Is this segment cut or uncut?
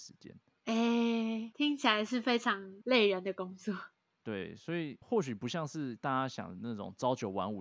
cut